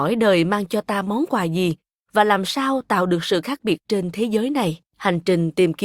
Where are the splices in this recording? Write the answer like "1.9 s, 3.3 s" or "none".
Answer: 4.9 s